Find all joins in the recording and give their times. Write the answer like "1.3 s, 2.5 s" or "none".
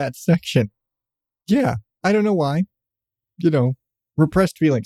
none